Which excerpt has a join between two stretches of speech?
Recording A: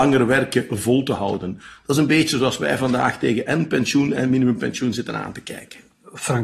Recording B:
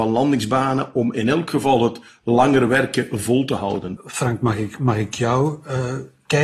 B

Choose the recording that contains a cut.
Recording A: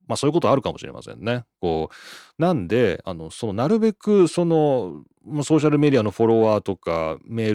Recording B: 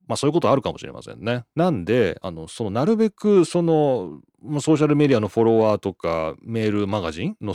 B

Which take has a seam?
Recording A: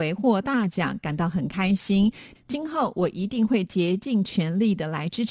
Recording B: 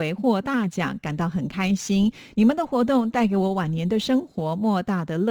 A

